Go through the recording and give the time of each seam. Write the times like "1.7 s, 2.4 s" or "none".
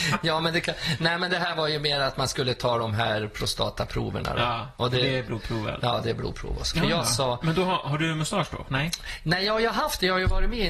6.7 s